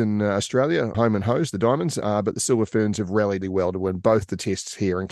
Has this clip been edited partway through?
yes; 2 cuts; at 0.9 s, 3.4 s

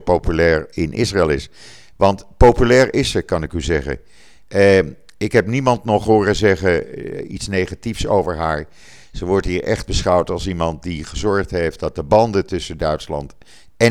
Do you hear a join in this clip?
no; 0 cuts

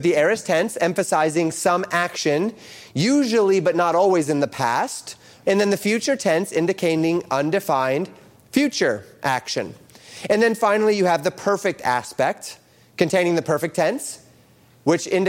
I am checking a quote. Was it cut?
yes; 1 cut; at 5.5 s

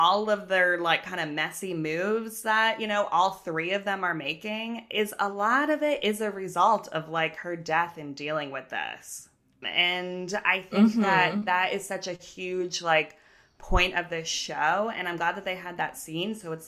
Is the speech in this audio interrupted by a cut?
yes; 1 cut; at 9.6 s

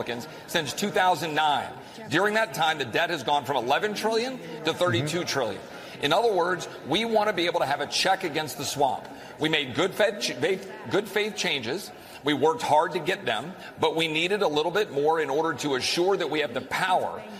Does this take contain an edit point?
no; 0 cuts

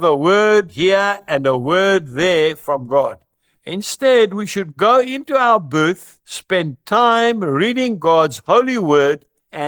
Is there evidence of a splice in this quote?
no; 0 cuts

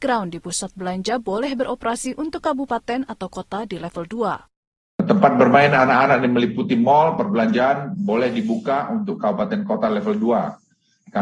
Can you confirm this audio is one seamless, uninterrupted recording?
yes; 0 cuts

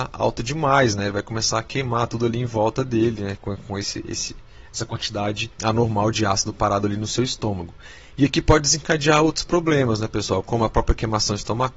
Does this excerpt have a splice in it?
no; 0 cuts

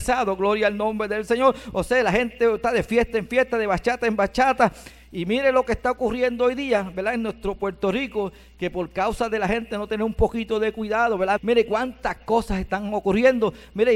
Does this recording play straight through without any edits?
no; 1 cut; at 11.4 s

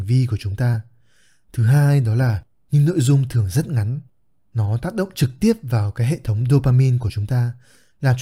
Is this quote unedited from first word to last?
yes; 0 cuts

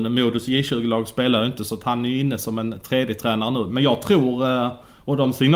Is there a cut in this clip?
no; 0 cuts

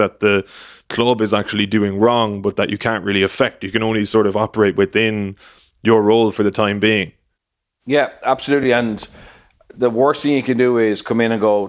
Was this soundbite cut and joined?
no; 0 cuts

